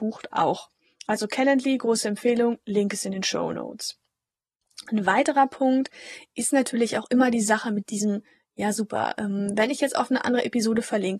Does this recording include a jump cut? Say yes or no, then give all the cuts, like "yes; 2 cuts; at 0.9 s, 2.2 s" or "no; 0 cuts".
no; 0 cuts